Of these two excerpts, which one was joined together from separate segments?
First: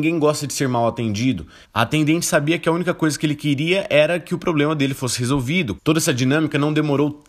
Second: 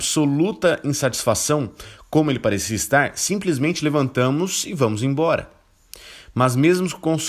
first; 2 cuts; at 1.6 s, 5.8 s

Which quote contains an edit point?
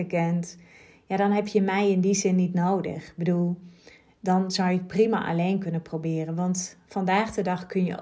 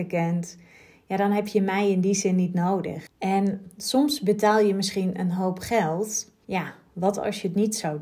second; 2 cuts; at 3.1 s, 6.4 s

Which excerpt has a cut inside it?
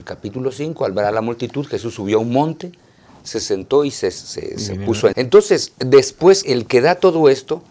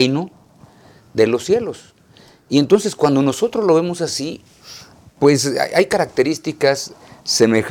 first; 2 cuts; at 5.1 s, 6.4 s

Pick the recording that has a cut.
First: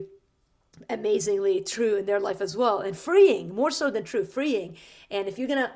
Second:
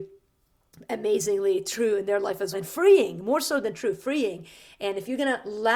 second; 1 cut; at 2.5 s

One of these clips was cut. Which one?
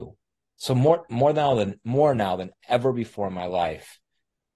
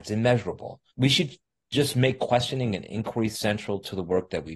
second; 1 cut; at 0.9 s

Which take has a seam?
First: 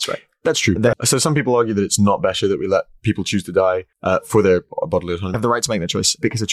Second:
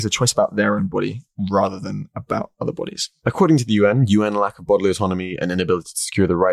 first; 3 cuts; at 0.9 s, 3.9 s, 5.3 s

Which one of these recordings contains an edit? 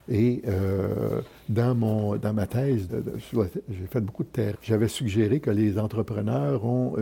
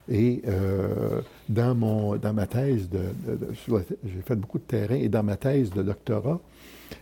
first; 2 cuts; at 2.9 s, 4.5 s

